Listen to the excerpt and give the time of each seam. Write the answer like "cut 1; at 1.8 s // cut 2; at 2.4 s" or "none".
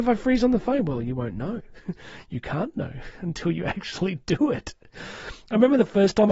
none